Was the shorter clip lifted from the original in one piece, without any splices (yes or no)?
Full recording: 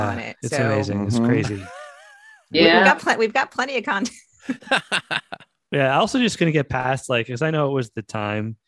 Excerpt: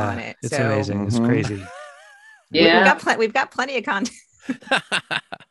yes